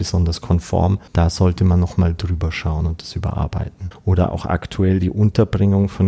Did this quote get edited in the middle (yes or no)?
yes